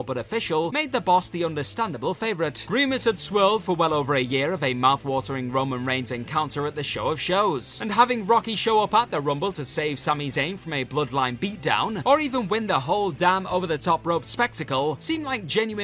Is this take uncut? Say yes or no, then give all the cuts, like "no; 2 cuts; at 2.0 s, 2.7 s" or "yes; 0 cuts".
no; 1 cut; at 2.7 s